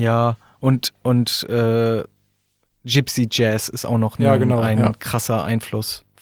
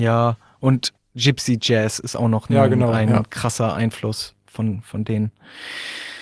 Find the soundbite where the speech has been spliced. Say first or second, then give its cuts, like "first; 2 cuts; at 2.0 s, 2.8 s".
second; 1 cut; at 1.0 s